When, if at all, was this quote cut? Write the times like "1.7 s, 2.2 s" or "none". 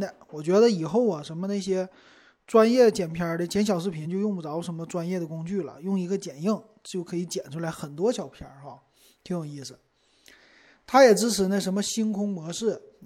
none